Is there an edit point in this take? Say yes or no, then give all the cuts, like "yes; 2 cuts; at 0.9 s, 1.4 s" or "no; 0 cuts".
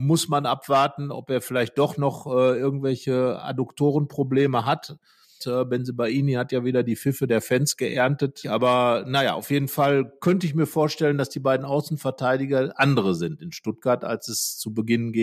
yes; 2 cuts; at 5.4 s, 8.4 s